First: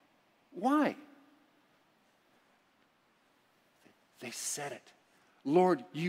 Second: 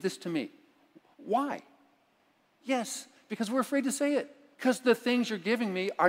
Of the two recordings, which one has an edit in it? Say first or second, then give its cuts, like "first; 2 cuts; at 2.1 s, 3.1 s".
second; 2 cuts; at 2.6 s, 4.5 s